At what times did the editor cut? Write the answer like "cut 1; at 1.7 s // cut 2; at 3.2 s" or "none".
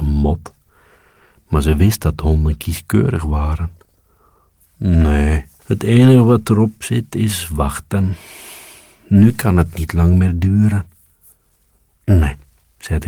cut 1; at 5.6 s

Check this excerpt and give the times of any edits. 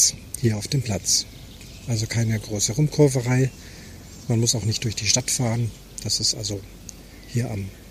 none

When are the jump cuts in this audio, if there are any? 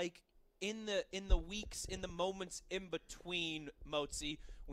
none

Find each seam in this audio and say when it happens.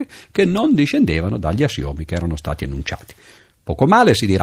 none

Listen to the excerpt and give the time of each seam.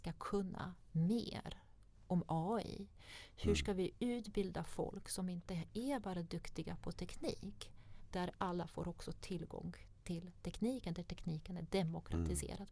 cut 1; at 8.1 s

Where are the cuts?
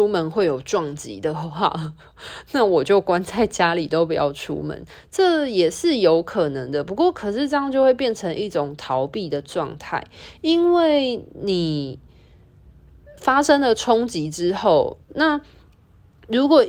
cut 1; at 15.1 s

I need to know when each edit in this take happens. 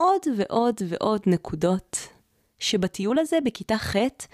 none

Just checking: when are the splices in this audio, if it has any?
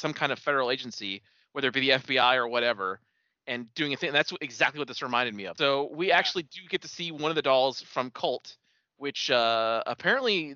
cut 1; at 5.6 s

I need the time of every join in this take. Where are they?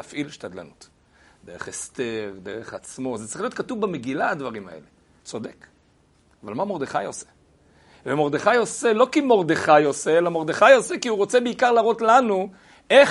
cut 1; at 5.2 s

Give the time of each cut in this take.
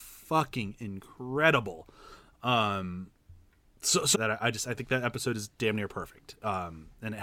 cut 1; at 4.1 s

